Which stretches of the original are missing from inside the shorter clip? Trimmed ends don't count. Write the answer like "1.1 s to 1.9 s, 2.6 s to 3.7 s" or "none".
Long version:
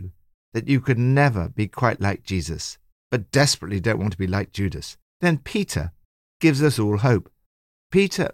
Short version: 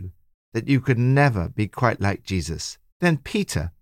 2.9 s to 5.1 s